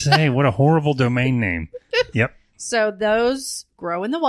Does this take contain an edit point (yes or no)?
yes